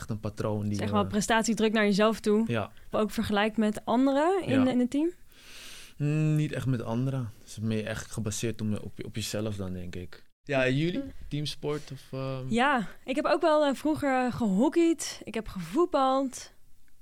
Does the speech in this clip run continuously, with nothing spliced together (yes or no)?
no